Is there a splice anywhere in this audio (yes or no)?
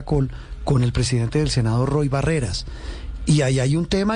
yes